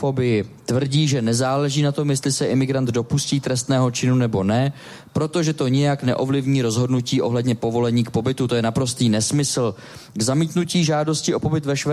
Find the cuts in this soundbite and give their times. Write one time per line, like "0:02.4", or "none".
none